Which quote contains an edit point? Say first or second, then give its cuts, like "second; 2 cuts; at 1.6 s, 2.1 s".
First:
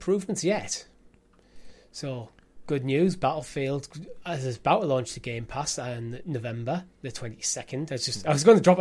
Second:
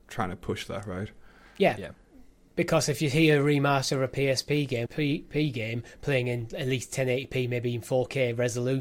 second; 1 cut; at 4.9 s